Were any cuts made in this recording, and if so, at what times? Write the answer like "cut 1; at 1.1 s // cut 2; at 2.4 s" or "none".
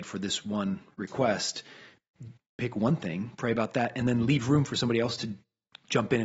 cut 1; at 2.4 s